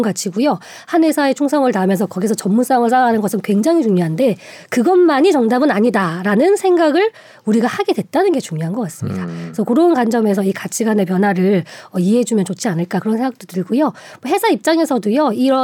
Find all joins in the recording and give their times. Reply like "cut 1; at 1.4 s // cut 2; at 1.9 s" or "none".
none